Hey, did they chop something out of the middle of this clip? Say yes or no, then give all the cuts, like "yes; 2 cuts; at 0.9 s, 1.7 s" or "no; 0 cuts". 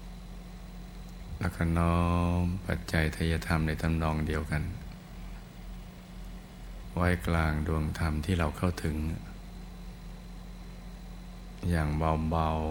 no; 0 cuts